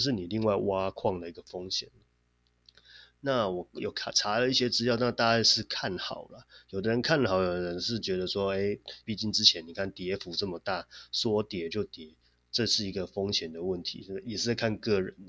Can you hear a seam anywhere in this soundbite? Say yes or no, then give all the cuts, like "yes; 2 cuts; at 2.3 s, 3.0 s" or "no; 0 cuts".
yes; 1 cut; at 9.0 s